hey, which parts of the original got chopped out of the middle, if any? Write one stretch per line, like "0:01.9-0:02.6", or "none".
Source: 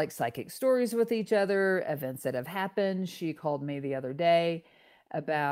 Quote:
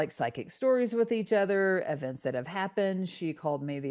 none